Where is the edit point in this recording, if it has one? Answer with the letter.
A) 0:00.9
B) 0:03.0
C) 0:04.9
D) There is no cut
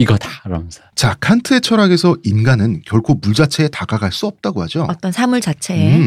D